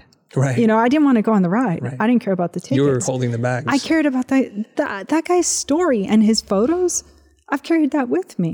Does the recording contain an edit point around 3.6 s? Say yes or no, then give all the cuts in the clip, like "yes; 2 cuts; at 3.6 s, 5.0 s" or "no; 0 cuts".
no; 0 cuts